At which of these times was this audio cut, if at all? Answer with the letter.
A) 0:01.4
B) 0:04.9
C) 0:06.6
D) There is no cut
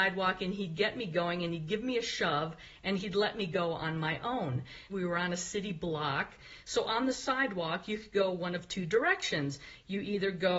B